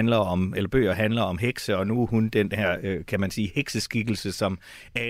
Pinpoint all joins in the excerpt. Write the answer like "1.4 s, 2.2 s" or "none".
none